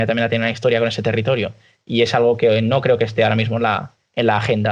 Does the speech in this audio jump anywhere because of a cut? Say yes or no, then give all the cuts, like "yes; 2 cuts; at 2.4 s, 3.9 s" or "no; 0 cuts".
no; 0 cuts